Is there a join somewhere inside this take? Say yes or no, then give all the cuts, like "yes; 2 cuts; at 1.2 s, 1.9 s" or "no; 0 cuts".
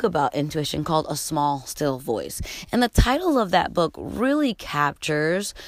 no; 0 cuts